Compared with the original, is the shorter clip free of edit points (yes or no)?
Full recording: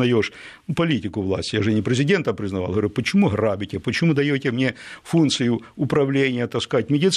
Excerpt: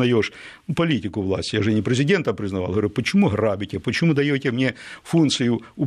yes